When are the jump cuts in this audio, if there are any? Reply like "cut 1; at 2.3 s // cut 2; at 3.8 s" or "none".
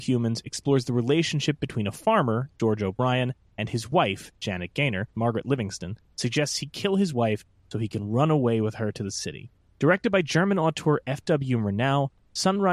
cut 1; at 5.1 s